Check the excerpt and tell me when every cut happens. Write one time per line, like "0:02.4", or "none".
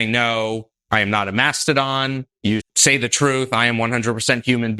0:02.6